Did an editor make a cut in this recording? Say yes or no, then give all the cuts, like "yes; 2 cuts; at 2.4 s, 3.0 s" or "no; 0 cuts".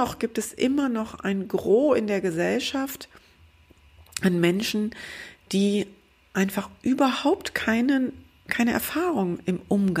no; 0 cuts